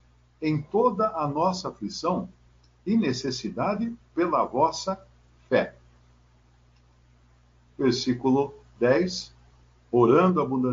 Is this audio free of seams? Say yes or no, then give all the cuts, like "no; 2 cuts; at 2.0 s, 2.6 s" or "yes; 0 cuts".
yes; 0 cuts